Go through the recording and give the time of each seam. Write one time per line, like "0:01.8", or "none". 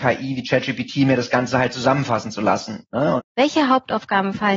0:03.2

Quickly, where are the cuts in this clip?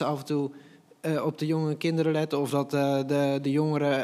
none

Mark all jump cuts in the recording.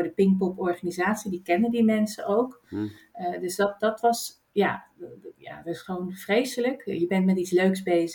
none

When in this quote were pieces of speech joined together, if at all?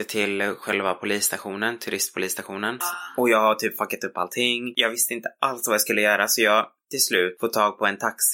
0:02.8

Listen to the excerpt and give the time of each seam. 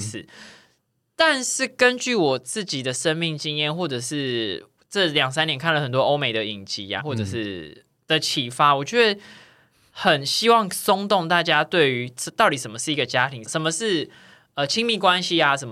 0:07.0
0:13.4

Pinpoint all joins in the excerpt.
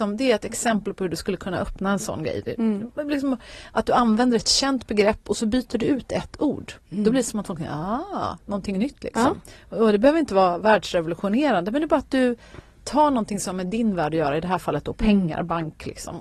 none

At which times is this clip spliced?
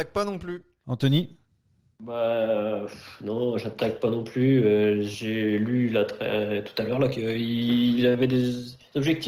none

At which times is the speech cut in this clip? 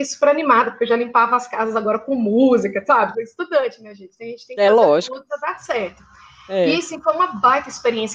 0:03.1

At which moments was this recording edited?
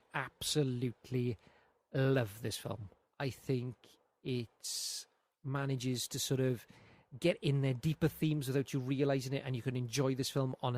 0:03.0

